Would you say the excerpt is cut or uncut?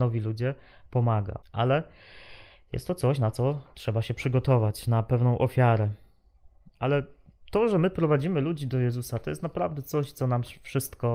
cut